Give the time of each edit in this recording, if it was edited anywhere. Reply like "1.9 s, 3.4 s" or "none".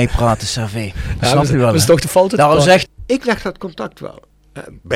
2.8 s